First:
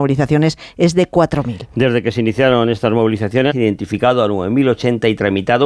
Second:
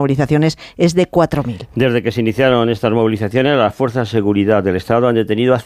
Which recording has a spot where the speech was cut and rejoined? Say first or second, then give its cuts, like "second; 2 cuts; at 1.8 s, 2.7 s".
first; 1 cut; at 3.5 s